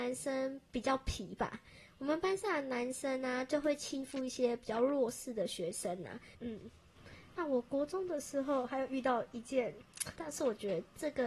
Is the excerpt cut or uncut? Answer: cut